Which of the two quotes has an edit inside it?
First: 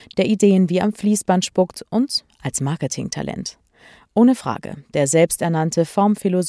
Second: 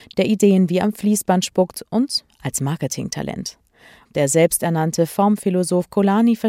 second; 1 cut; at 4.0 s

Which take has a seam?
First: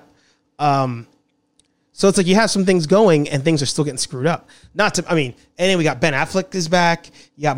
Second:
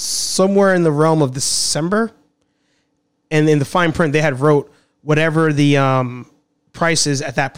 second; 1 cut; at 3.1 s

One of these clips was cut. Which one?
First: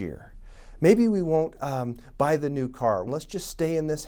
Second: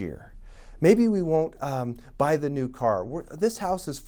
first; 1 cut; at 3.1 s

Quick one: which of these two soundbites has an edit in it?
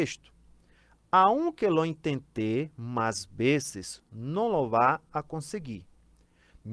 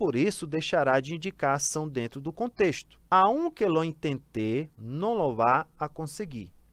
second; 2 cuts; at 3.1 s, 4.7 s

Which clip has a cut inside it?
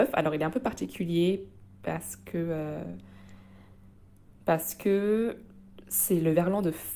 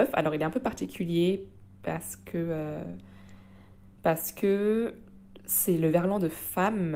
second; 1 cut; at 3.9 s

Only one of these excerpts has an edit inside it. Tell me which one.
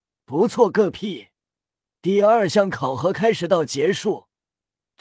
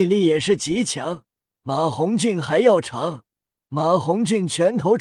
second; 2 cuts; at 1.6 s, 3.5 s

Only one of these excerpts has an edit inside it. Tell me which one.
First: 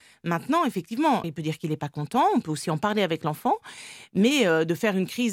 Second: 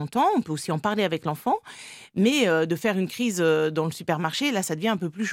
first; 1 cut; at 1.2 s

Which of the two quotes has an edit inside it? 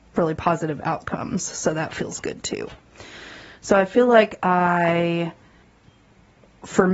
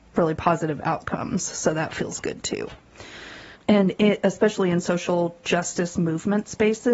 second; 1 cut; at 3.5 s

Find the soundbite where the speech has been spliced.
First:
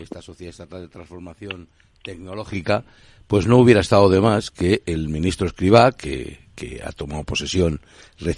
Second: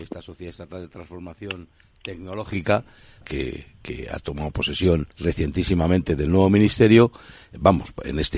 second; 2 cuts; at 3.2 s, 5.1 s

